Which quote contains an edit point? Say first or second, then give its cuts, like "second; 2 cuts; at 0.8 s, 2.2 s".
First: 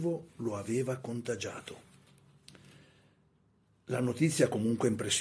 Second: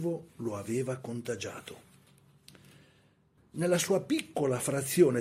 second; 1 cut; at 3.4 s